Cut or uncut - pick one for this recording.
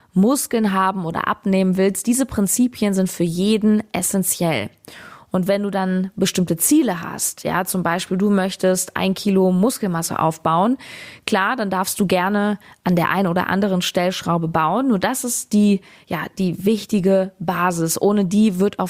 uncut